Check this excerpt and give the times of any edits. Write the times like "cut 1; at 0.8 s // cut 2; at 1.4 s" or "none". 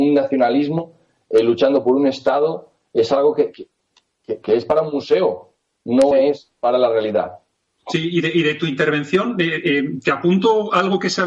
none